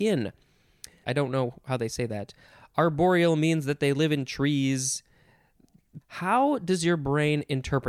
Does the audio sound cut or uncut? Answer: cut